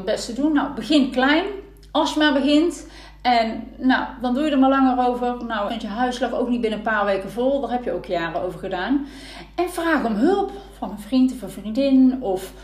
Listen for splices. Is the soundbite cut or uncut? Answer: cut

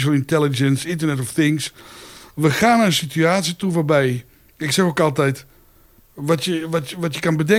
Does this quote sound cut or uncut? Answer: uncut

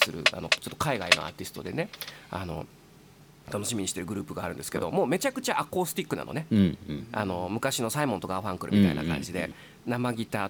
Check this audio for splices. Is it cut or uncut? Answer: uncut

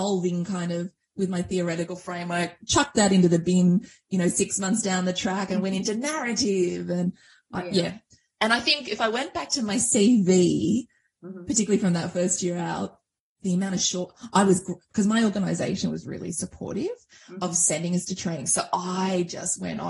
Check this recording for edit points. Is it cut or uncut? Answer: cut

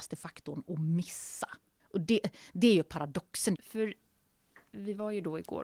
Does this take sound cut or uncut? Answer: cut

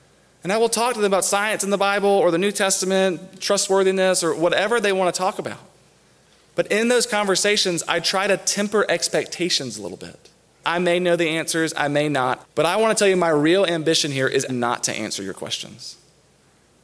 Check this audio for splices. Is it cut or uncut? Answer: cut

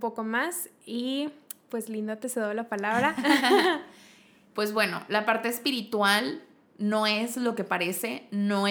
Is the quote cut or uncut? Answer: uncut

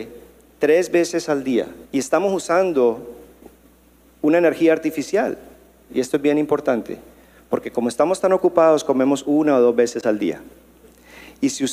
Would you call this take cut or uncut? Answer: cut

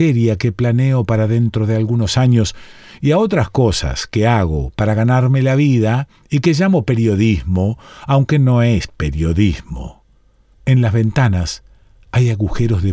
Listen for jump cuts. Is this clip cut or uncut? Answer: cut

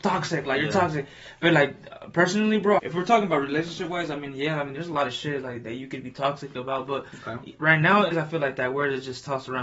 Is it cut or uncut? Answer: cut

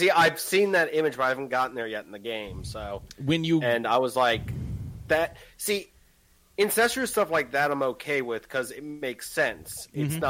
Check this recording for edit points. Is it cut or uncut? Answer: uncut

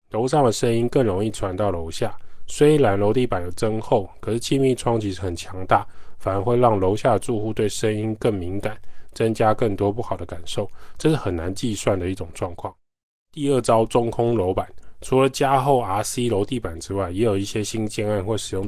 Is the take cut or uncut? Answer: uncut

